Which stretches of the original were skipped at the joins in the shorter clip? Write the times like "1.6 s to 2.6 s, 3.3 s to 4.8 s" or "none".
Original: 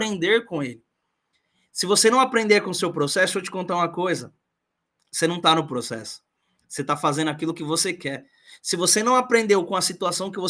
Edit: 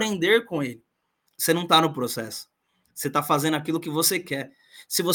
1.3 s to 5.0 s